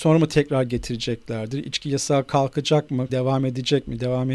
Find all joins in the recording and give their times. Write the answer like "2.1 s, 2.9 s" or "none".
3.1 s